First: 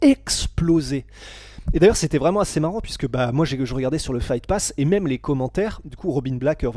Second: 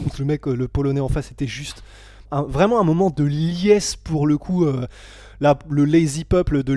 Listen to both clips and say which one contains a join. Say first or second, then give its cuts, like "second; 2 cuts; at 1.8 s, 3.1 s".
second; 1 cut; at 2.2 s